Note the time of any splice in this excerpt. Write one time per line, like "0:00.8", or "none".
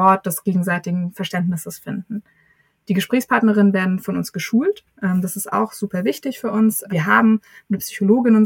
none